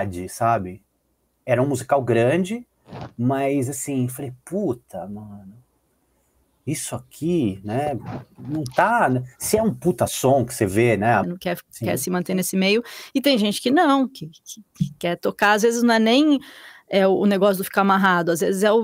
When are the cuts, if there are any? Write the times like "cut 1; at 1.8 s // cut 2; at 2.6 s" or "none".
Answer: cut 1; at 11.2 s

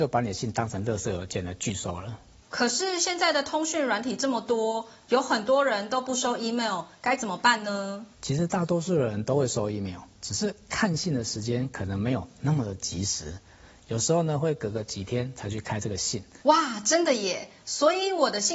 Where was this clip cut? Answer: cut 1; at 8.1 s // cut 2; at 16.4 s

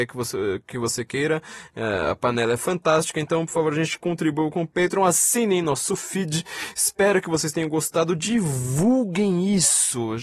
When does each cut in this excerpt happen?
none

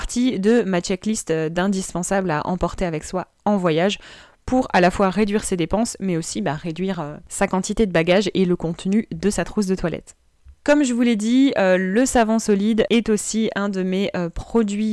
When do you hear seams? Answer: cut 1; at 10.5 s

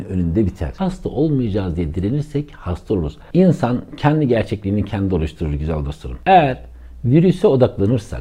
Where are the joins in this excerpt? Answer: cut 1; at 3.3 s

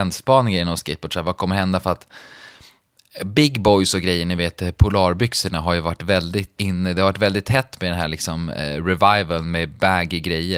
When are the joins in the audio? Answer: cut 1; at 6.6 s

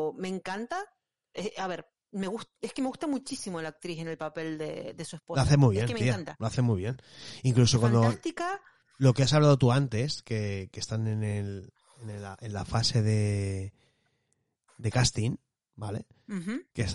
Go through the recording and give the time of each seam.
none

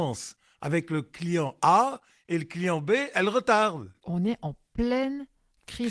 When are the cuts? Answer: cut 1; at 4.0 s

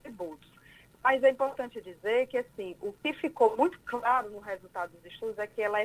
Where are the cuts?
none

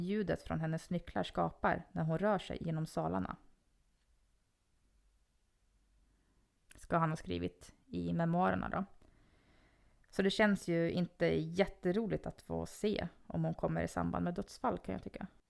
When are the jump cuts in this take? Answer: none

